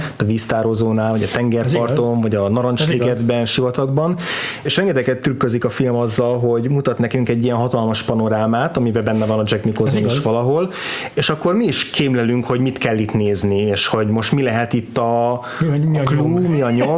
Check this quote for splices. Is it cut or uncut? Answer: cut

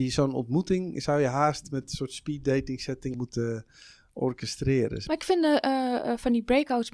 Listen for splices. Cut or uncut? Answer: cut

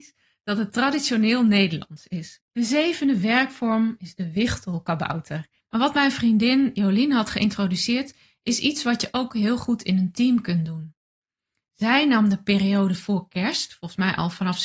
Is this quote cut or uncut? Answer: cut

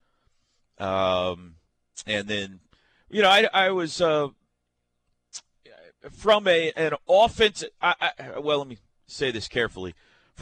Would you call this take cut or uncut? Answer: uncut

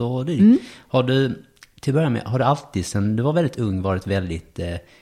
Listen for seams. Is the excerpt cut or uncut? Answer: uncut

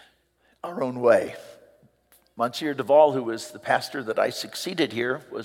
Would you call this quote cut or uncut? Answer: uncut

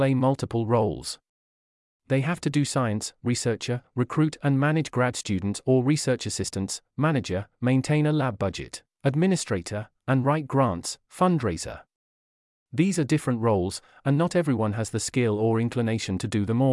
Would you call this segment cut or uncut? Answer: uncut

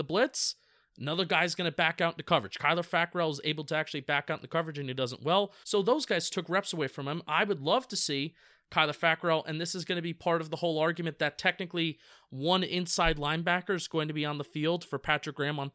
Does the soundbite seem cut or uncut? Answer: cut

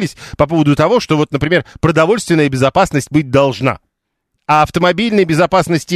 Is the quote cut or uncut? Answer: uncut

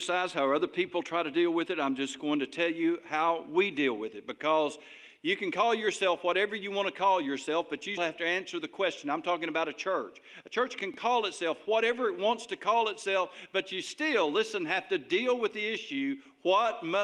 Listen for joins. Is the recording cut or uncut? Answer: cut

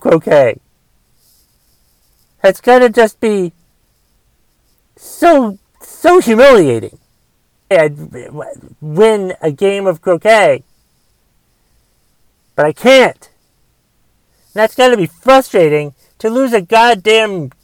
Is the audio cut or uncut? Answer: cut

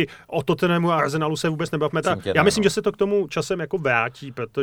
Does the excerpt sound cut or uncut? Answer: cut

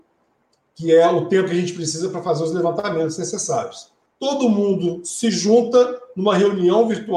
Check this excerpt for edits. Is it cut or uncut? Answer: cut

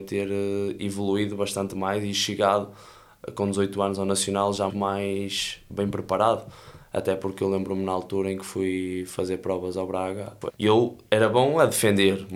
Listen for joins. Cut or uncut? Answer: cut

